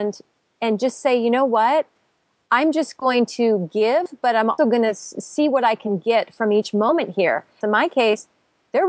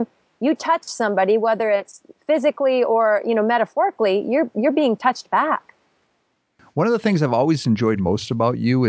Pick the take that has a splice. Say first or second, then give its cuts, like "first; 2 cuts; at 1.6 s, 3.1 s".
first; 2 cuts; at 4.6 s, 7.6 s